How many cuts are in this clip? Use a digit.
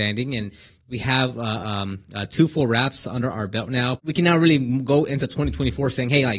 1